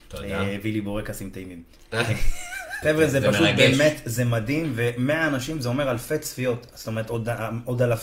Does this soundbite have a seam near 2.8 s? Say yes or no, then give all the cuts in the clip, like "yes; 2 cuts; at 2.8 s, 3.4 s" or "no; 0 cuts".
yes; 1 cut; at 2.8 s